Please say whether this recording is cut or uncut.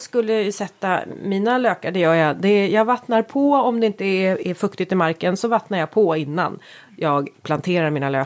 uncut